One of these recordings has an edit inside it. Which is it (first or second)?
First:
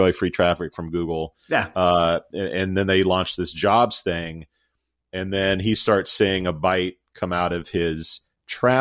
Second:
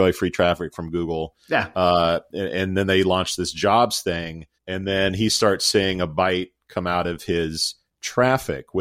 second